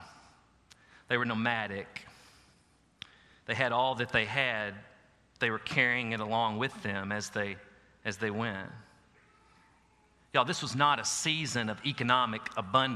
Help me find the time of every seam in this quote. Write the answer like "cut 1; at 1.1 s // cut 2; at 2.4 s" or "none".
none